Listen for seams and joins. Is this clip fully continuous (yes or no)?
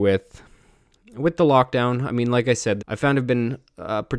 no